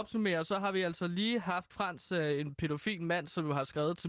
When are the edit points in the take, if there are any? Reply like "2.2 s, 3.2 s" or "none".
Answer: 1.7 s

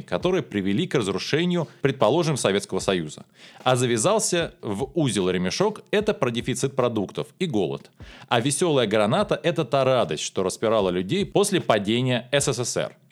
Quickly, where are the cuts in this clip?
1.8 s

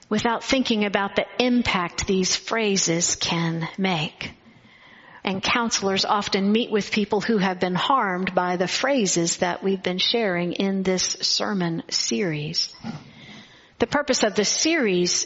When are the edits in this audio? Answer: 5.2 s

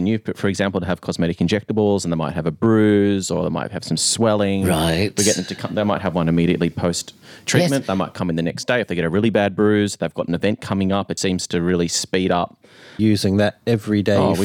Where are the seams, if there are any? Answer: 11.2 s, 13.0 s

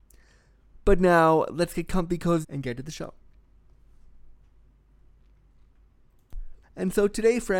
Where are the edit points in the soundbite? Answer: 2.4 s, 6.6 s

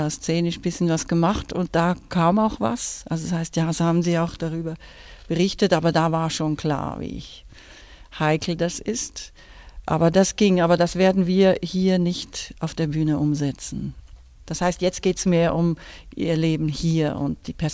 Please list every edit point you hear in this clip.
none

